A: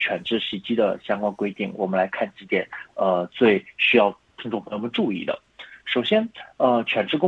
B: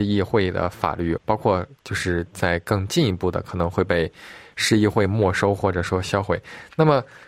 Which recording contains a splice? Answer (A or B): B